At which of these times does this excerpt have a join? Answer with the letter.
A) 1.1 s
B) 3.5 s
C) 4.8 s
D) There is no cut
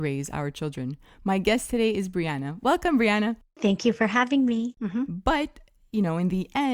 C